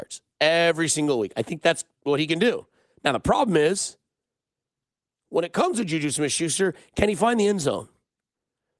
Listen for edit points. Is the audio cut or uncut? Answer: uncut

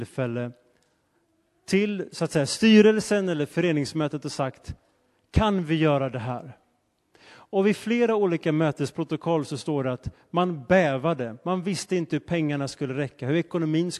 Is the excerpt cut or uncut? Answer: uncut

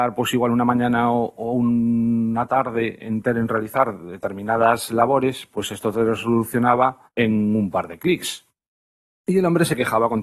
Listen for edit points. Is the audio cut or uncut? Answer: uncut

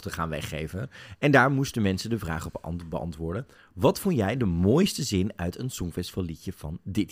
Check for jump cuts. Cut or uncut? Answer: uncut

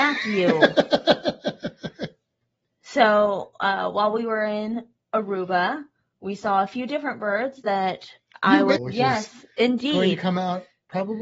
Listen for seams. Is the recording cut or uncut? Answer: cut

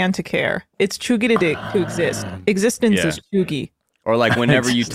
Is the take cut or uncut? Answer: uncut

